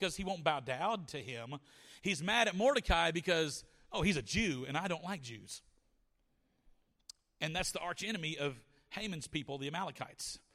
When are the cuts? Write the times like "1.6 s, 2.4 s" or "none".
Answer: none

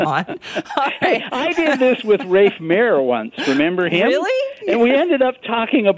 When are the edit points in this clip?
none

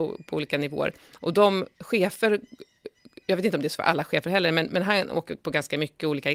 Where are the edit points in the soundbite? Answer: 1.7 s

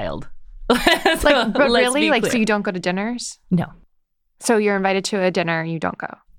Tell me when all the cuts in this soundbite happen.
none

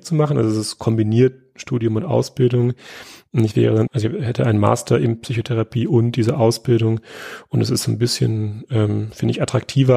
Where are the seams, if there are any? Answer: 3.9 s

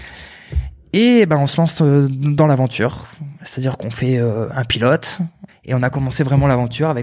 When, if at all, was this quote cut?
5.5 s

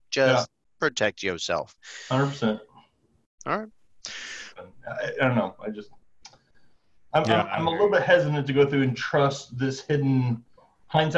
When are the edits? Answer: 3.4 s, 4.6 s

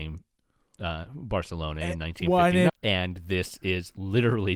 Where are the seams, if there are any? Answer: 2.7 s

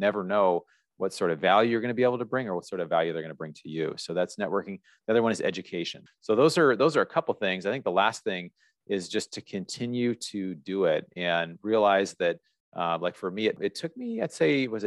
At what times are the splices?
6.1 s

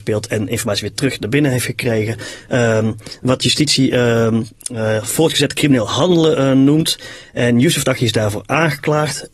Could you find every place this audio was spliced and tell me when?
none

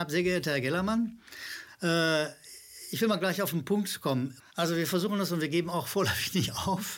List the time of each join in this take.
4.4 s

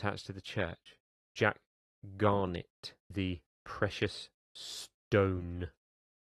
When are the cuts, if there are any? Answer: 1.2 s, 3.0 s

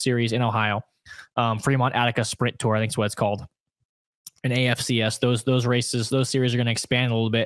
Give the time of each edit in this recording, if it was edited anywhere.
none

